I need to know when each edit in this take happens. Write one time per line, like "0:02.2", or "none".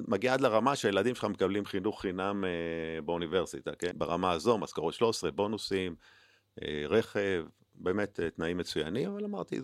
0:03.9